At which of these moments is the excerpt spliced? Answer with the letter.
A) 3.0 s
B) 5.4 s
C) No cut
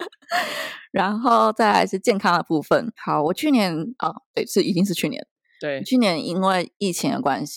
A